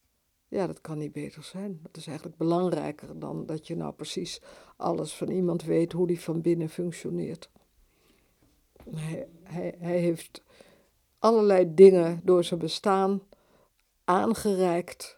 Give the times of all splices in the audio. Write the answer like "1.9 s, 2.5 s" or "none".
none